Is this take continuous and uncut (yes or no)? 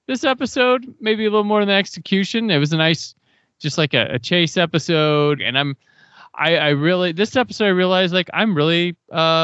no